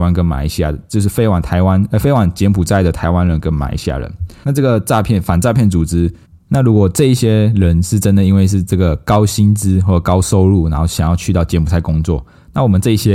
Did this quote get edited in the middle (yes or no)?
yes